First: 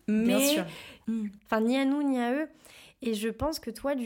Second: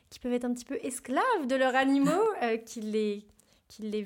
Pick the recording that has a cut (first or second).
first